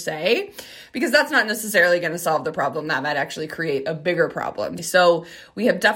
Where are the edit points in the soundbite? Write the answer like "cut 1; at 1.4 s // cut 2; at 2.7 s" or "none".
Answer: cut 1; at 4.8 s